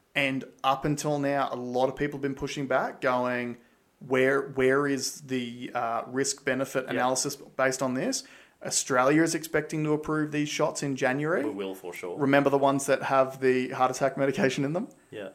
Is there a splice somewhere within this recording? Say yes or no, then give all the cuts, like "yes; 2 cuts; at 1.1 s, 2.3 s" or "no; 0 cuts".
no; 0 cuts